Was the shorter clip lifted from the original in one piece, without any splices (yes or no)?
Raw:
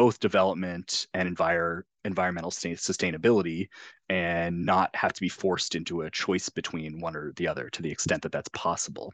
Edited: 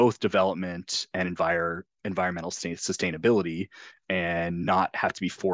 yes